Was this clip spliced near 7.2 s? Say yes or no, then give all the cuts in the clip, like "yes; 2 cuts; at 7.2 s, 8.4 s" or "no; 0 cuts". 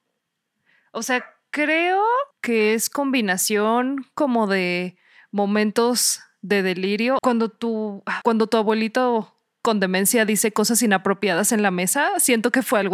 yes; 3 cuts; at 2.3 s, 7.2 s, 8.2 s